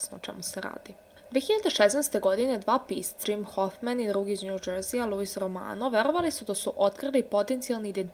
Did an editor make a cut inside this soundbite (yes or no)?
yes